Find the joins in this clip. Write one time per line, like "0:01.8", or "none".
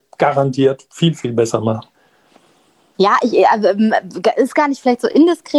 0:02.9